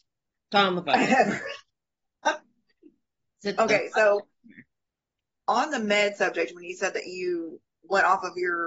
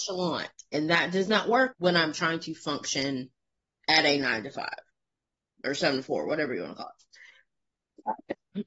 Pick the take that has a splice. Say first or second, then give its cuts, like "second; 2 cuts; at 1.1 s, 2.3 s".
second; 1 cut; at 1.7 s